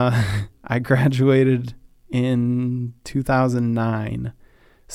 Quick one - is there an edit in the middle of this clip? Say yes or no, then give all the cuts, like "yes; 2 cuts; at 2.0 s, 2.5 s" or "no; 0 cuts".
no; 0 cuts